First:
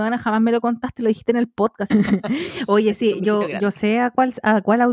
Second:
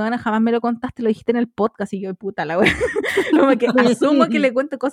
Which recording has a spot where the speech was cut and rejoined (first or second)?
first